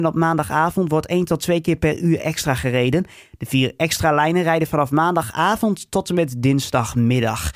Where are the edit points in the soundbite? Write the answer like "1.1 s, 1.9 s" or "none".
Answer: 3.3 s